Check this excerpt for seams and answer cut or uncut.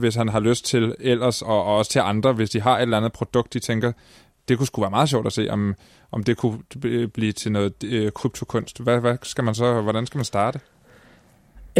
cut